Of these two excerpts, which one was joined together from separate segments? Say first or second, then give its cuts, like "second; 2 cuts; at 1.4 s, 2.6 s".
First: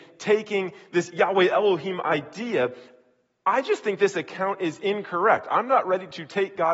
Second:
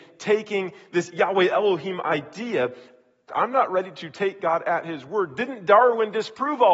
second; 1 cut; at 3.3 s